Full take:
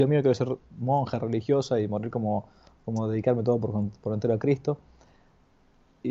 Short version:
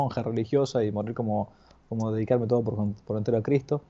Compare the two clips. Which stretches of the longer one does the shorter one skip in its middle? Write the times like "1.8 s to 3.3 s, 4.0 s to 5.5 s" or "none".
none

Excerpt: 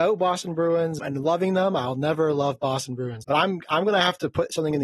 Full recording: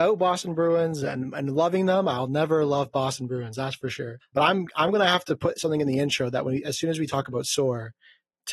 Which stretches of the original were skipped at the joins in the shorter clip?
1.0 s to 1.3 s, 3.5 s to 4.3 s

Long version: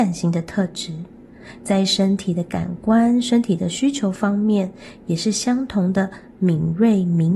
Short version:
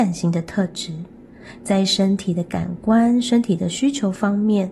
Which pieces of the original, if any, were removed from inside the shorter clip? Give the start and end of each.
none

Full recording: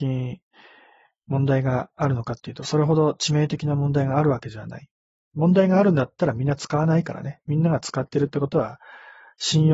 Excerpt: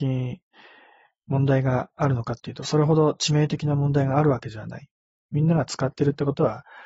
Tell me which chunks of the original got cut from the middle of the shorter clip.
5.3 s to 7.4 s

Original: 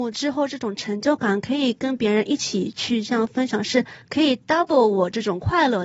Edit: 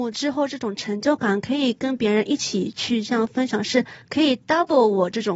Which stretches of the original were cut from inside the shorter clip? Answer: none

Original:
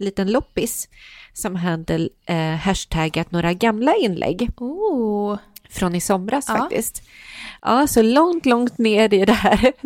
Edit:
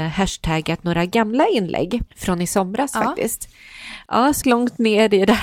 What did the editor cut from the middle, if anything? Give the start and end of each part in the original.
4.5 s to 5.6 s, 8.0 s to 8.4 s

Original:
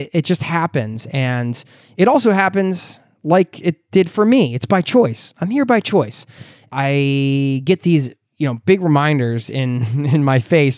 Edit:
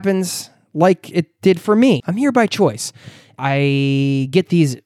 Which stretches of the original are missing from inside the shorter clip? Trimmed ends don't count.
4.5 s to 5.3 s

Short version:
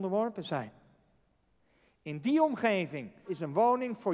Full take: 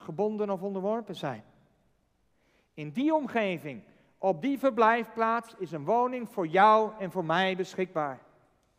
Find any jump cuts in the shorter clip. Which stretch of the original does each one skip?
4.0 s to 5.6 s

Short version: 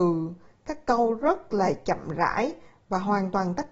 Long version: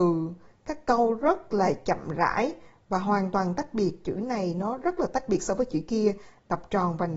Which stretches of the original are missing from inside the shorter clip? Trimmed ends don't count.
none

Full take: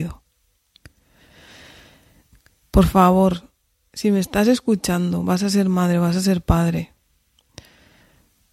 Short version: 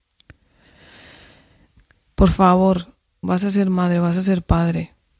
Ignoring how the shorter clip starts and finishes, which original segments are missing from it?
3.8 s to 5.2 s

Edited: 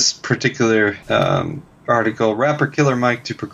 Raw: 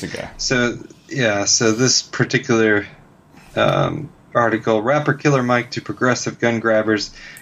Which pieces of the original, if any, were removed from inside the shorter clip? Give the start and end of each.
2.9 s to 3.5 s

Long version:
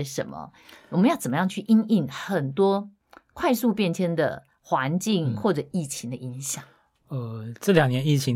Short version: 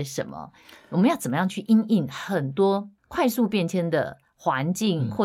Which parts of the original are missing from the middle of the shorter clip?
3.0 s to 3.2 s

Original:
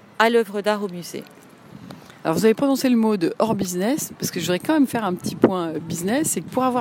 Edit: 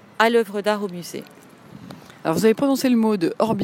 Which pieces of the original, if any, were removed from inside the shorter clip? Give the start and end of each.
none

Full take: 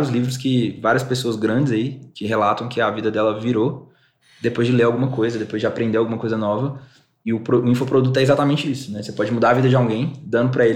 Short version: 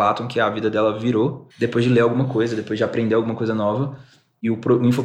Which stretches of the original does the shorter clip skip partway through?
3.9 s to 4.3 s

